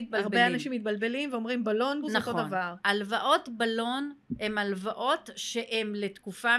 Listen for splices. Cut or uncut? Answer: cut